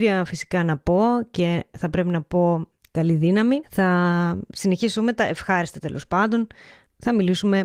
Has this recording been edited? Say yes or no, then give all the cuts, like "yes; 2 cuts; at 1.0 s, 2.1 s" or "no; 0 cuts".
yes; 1 cut; at 3.6 s